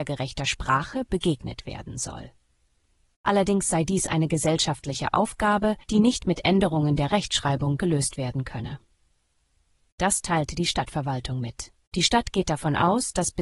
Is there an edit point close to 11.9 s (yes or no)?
yes